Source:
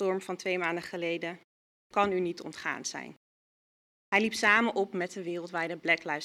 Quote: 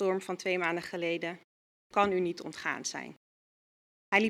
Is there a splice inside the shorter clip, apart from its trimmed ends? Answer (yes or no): no